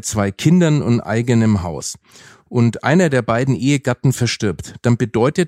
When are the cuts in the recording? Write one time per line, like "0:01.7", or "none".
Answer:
none